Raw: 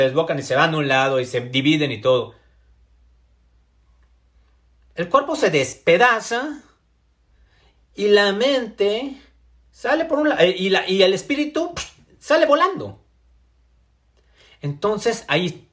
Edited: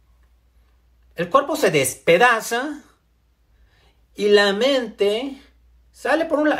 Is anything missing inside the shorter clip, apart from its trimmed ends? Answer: no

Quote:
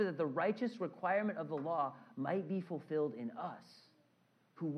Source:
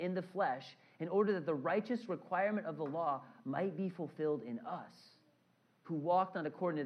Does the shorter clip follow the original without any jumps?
yes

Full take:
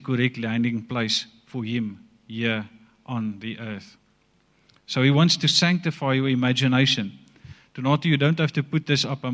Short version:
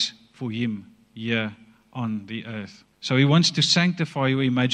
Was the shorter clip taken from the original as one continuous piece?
no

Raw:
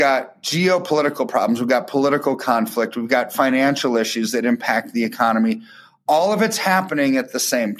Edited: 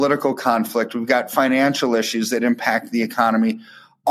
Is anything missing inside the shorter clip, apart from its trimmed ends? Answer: no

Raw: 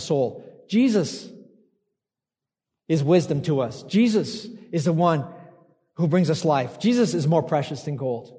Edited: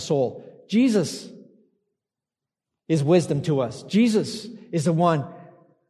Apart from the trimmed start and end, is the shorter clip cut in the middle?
no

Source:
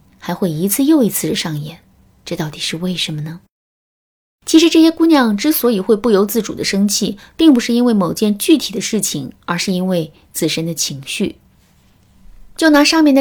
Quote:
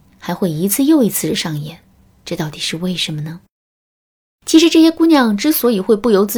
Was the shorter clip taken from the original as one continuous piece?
yes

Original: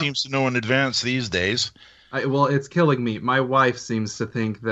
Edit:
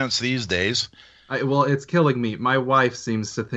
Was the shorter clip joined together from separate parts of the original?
no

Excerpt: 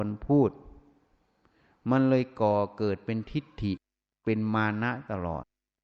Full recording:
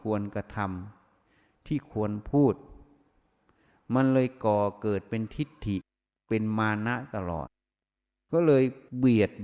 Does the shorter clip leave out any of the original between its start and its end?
no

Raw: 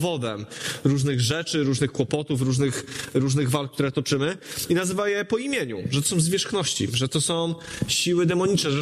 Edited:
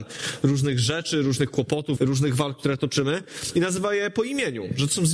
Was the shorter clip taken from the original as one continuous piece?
no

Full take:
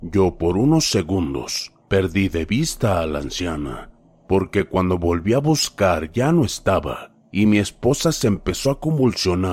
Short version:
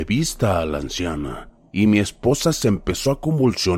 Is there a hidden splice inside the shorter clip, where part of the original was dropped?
yes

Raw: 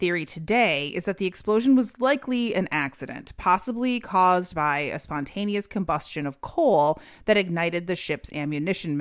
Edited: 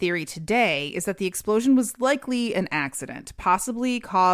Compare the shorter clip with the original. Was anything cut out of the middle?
no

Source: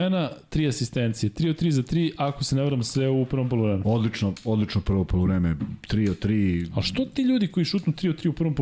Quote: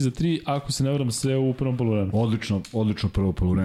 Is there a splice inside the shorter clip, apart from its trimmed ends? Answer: no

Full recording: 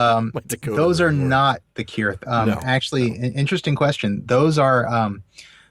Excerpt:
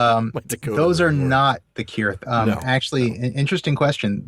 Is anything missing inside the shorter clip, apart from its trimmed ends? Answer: no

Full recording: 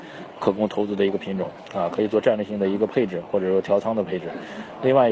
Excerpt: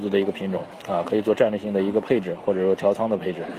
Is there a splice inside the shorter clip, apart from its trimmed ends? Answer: no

